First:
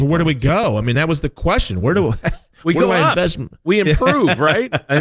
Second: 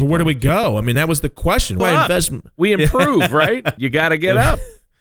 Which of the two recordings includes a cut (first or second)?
second